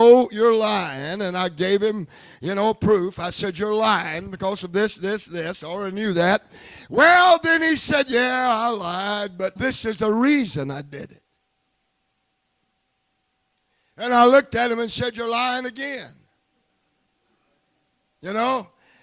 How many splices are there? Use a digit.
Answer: 1